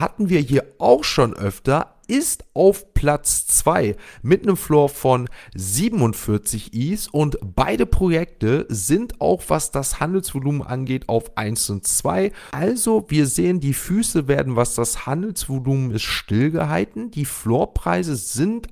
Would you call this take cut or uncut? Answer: cut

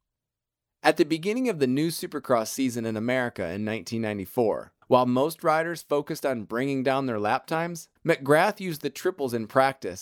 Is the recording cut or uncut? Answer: cut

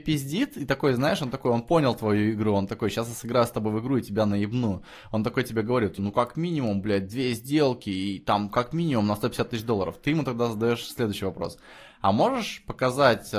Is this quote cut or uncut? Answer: cut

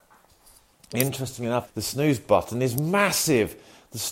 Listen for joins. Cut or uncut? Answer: cut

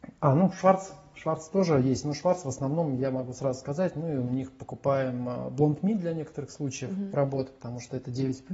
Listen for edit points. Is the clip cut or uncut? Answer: uncut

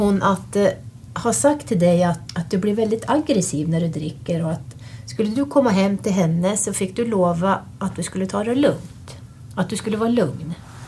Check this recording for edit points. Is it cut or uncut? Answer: cut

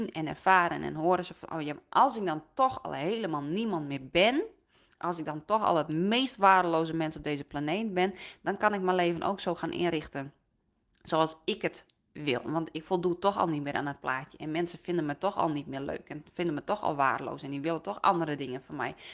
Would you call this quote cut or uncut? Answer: uncut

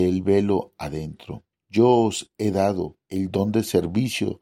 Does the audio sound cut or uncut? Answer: cut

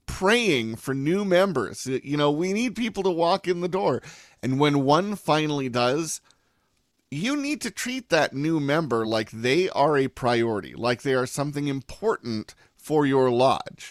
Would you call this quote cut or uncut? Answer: uncut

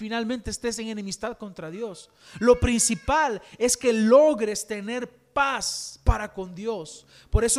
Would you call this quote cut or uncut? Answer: uncut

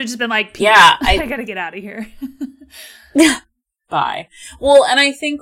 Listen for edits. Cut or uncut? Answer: uncut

